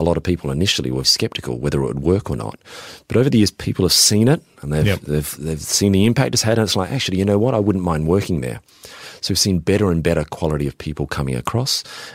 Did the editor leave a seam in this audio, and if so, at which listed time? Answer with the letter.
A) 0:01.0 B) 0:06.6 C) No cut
A